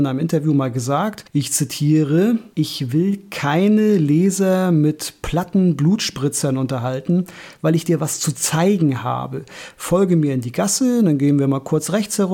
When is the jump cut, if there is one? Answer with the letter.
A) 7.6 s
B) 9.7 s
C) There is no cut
A